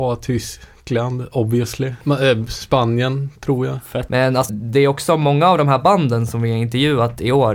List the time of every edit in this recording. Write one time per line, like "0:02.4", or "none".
0:04.5